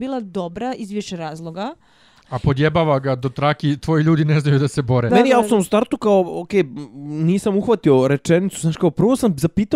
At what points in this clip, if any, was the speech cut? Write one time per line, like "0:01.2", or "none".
0:02.2
0:05.1